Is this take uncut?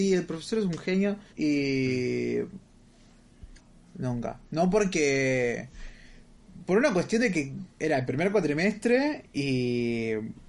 no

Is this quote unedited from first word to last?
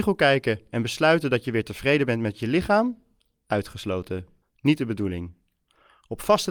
no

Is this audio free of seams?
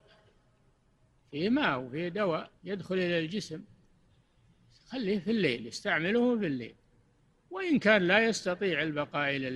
no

